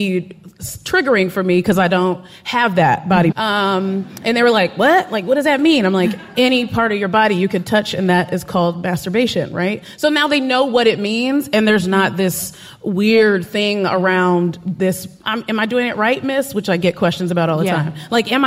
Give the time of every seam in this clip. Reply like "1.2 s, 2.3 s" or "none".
3.3 s